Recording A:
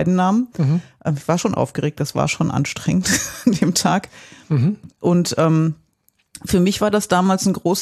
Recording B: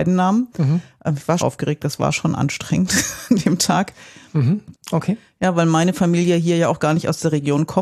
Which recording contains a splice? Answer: B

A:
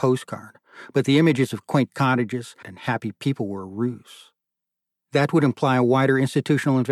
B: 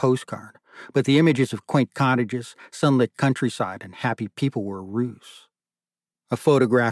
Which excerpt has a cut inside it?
A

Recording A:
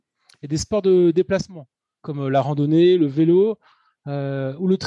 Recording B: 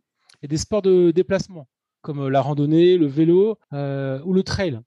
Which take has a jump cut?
B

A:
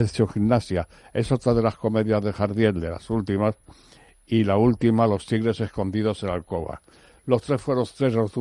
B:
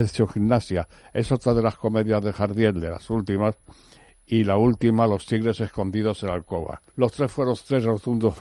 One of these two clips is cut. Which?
B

